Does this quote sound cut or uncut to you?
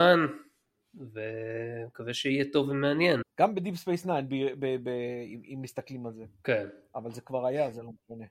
cut